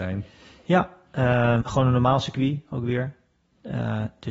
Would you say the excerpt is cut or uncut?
cut